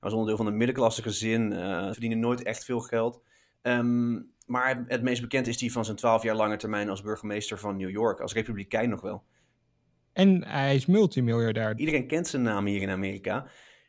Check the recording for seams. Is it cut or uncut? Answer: cut